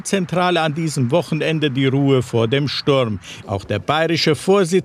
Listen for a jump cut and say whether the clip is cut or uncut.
cut